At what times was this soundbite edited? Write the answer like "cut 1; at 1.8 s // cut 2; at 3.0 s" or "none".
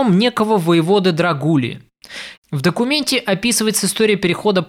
cut 1; at 2.3 s

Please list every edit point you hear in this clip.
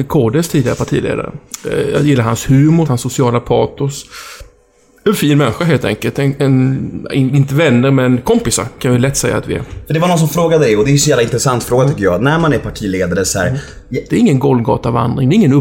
cut 1; at 2.8 s // cut 2; at 14.1 s

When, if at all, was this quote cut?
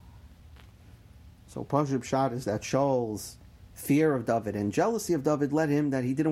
none

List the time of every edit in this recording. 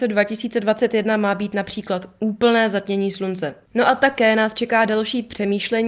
cut 1; at 3.7 s

